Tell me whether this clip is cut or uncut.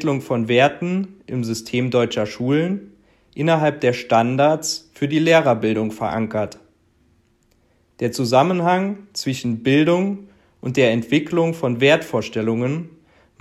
uncut